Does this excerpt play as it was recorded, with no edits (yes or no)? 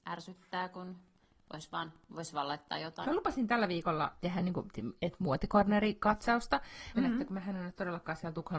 no